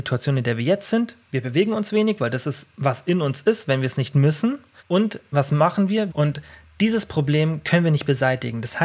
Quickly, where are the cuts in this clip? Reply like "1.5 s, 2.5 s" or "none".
4.8 s, 6.1 s